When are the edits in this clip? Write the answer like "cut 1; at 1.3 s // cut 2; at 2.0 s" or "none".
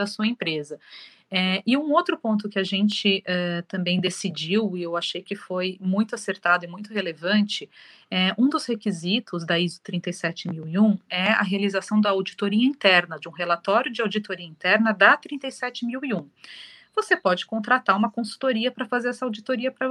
none